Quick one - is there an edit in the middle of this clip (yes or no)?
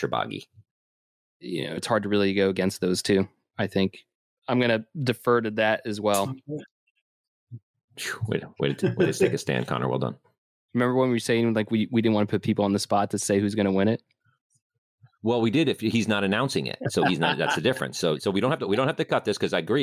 yes